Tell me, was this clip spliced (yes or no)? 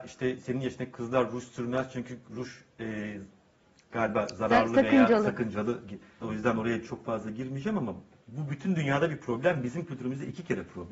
yes